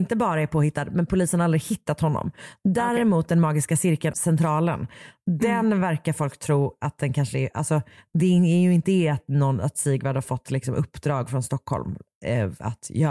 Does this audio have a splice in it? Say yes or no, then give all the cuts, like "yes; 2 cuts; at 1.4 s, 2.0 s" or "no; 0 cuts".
yes; 1 cut; at 4.1 s